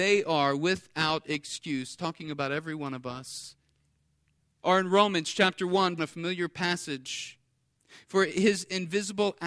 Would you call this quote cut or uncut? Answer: cut